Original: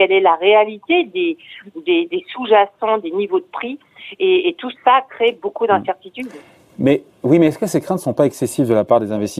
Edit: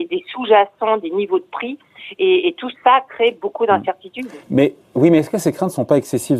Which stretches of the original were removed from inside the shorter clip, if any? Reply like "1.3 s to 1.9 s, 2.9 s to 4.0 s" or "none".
6.4 s to 6.7 s